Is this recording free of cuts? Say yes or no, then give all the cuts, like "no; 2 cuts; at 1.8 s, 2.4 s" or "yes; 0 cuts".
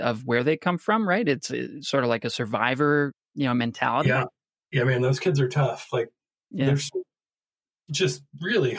yes; 0 cuts